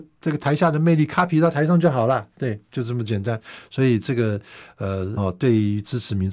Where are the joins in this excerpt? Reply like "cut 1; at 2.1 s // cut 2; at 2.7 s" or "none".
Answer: cut 1; at 3.7 s // cut 2; at 5.2 s